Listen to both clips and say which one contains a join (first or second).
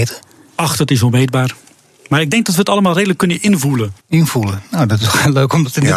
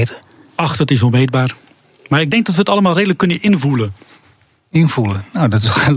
first